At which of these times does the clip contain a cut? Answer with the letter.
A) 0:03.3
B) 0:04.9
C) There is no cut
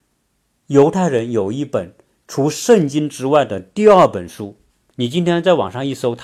B